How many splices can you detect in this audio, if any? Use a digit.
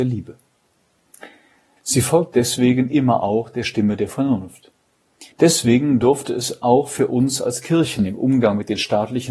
2